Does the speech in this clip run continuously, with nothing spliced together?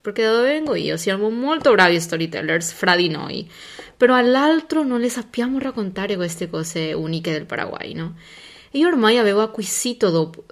yes; 0 cuts

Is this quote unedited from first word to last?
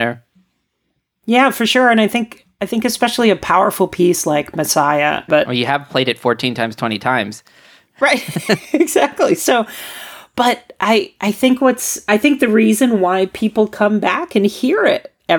no; 1 cut; at 5.3 s

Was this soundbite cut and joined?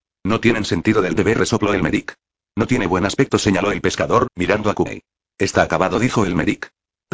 no; 0 cuts

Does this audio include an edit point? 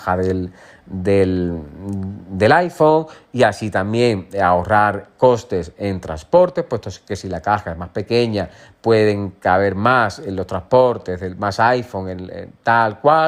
no; 0 cuts

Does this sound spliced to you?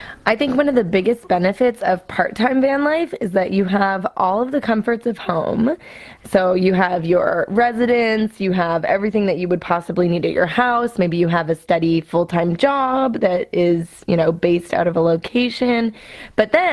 no; 0 cuts

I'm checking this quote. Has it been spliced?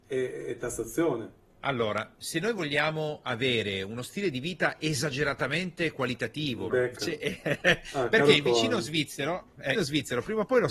yes; 3 cuts; at 1.5 s, 6.7 s, 9.7 s

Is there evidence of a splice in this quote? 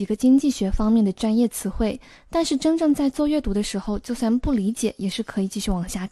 no; 0 cuts

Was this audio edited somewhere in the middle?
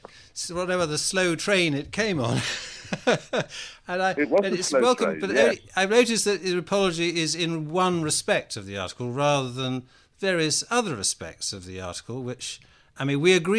no; 0 cuts

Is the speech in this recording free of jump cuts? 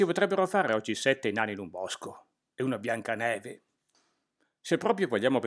yes; 0 cuts

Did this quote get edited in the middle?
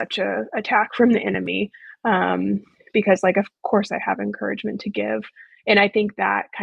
no; 0 cuts

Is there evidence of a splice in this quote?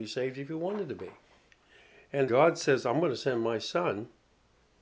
yes; 1 cut; at 2.3 s

